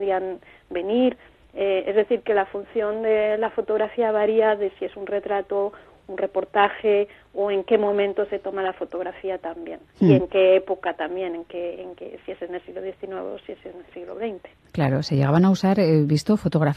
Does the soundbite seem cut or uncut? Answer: uncut